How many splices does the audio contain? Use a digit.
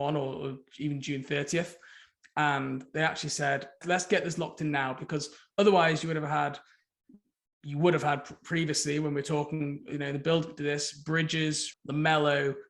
2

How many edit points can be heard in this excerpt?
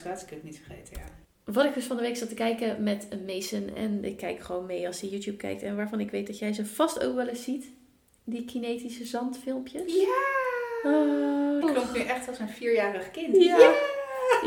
1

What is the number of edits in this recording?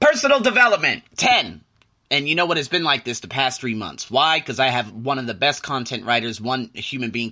0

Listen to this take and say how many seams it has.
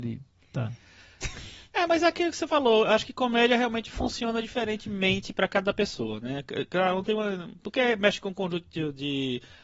0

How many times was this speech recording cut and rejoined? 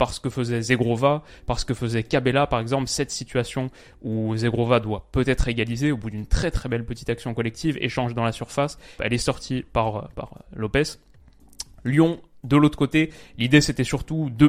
1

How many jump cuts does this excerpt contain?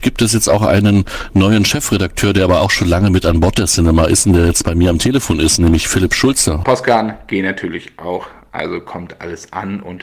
1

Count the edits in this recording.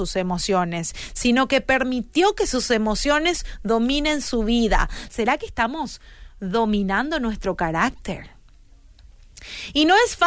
1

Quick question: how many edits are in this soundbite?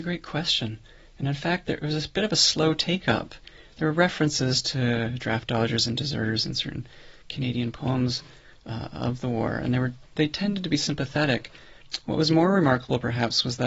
0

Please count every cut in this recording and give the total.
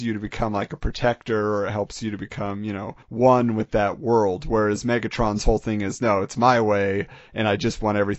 1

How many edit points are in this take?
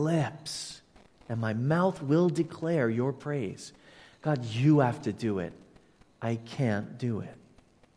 0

